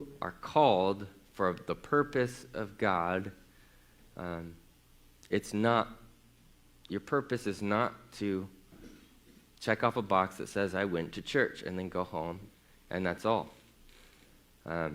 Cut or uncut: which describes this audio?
uncut